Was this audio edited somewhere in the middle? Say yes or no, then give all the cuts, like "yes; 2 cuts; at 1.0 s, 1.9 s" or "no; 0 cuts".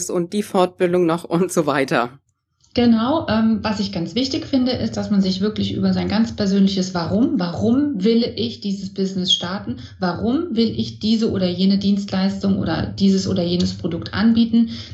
no; 0 cuts